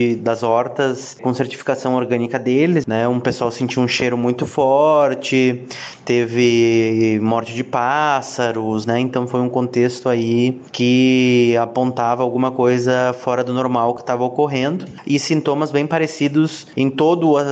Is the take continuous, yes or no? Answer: no